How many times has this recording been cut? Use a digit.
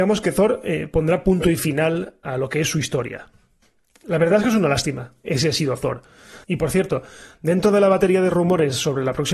2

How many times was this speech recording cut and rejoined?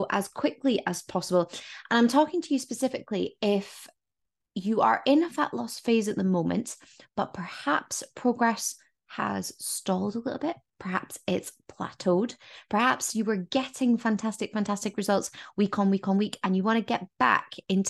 0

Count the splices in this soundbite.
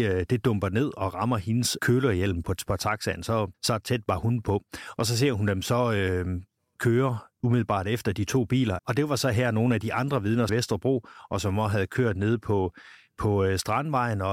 3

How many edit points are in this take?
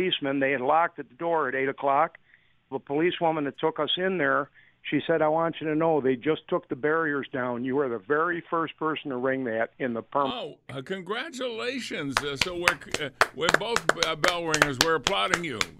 1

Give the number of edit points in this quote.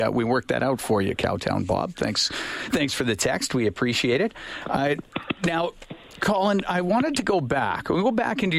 0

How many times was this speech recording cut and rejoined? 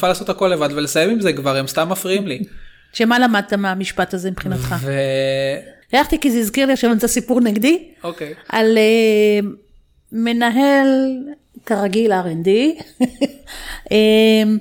1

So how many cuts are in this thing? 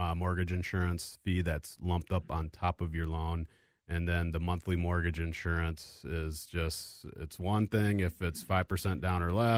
0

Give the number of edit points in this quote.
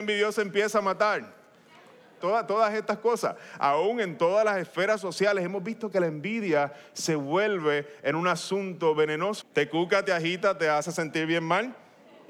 2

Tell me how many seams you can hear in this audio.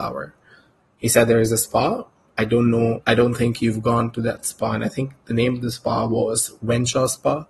0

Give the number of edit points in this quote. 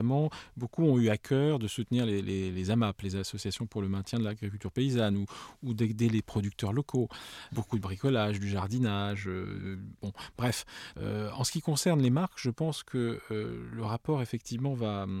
2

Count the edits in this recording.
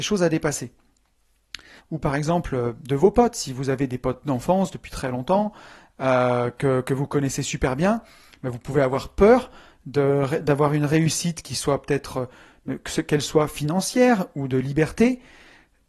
1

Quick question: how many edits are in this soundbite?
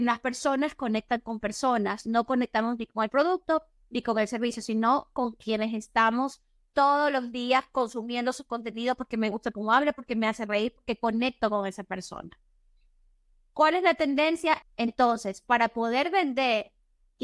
1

